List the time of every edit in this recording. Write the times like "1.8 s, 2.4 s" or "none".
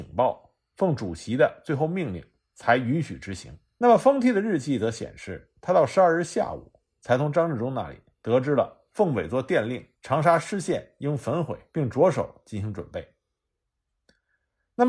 3.8 s, 9.9 s, 11.7 s

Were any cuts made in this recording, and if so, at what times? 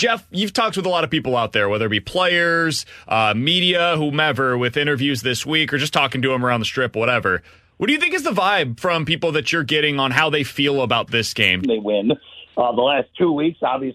11.6 s

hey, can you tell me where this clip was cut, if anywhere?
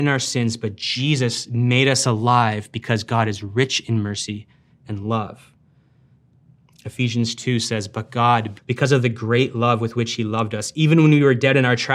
8.6 s

